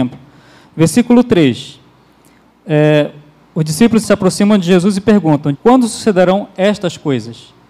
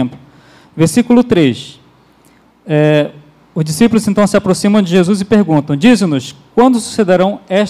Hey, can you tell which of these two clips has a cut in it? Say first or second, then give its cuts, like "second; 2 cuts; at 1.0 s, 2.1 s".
first; 2 cuts; at 4.0 s, 5.5 s